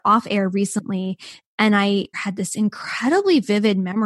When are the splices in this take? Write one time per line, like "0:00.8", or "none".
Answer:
0:02.1